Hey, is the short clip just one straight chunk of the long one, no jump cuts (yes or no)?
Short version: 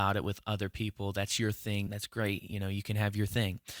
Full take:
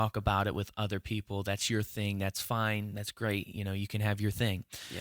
no